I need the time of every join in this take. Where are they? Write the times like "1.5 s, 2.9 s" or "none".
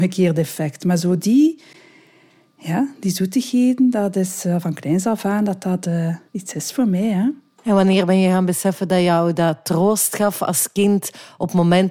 6.3 s